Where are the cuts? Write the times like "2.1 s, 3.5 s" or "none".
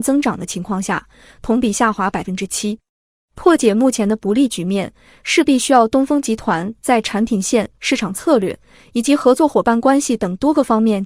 1.3 s